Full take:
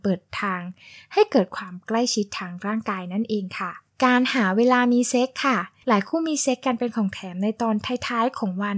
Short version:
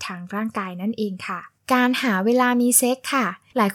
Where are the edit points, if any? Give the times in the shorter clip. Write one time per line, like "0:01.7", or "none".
none